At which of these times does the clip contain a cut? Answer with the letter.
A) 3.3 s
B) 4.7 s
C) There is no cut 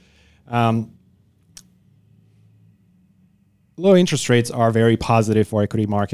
C